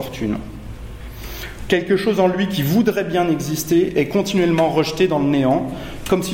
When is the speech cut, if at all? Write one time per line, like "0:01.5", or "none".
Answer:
0:01.7